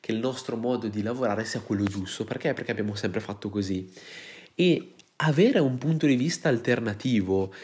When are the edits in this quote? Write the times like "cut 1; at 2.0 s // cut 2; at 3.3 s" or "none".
none